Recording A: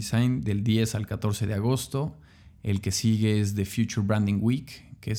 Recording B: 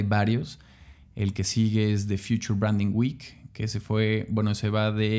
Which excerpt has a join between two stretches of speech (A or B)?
B